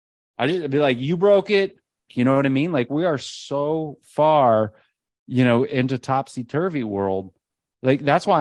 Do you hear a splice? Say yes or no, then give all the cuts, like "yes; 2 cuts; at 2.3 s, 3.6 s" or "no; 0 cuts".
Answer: yes; 1 cut; at 2.1 s